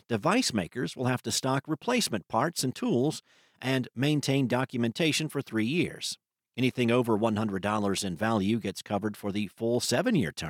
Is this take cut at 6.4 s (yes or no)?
no